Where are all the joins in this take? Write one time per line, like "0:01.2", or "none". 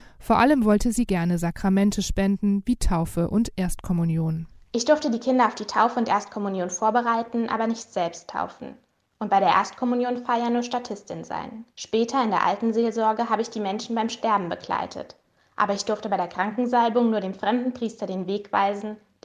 0:11.7